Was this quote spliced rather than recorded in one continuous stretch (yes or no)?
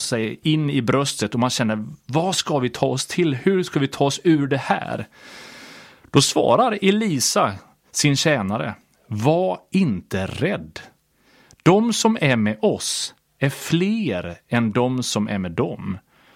no